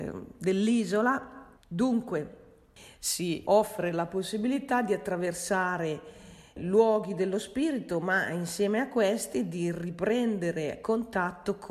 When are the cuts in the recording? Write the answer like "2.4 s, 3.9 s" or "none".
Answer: 1.5 s, 3.4 s